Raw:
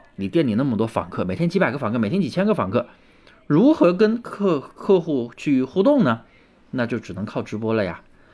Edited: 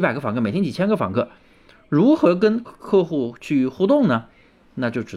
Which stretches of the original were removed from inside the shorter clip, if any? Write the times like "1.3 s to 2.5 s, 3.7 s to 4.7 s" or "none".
4.2 s to 4.6 s